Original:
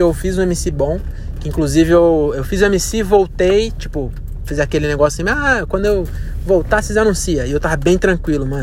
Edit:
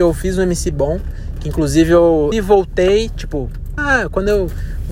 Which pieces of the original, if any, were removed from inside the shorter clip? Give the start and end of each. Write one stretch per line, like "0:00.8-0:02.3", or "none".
0:02.3-0:02.9
0:04.4-0:05.3